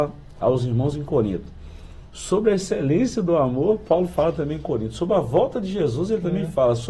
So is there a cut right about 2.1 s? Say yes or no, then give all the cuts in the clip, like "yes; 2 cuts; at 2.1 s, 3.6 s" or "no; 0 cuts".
yes; 1 cut; at 2.1 s